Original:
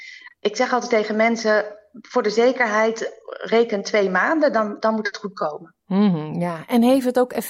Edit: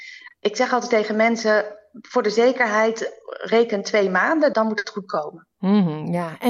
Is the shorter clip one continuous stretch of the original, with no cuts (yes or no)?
no